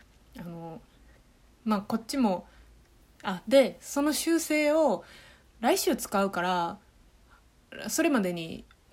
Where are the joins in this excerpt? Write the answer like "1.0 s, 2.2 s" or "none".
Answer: none